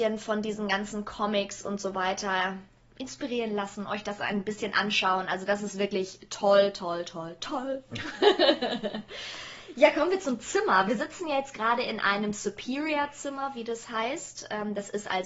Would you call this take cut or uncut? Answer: uncut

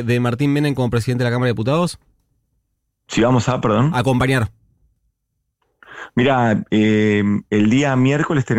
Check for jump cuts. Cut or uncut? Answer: uncut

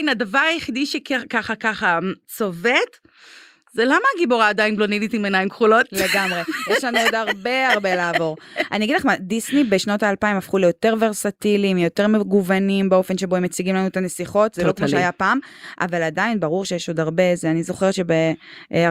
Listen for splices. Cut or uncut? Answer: cut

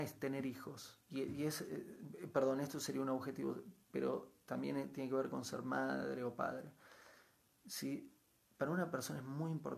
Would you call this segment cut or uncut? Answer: uncut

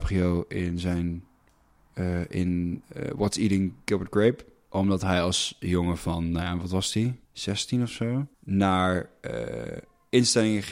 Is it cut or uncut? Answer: cut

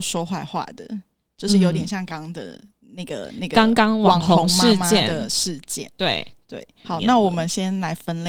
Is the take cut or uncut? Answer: cut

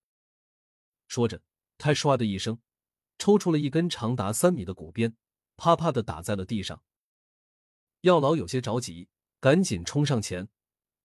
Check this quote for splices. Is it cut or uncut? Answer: uncut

